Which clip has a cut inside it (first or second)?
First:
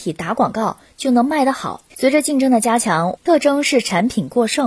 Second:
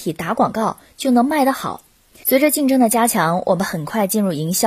first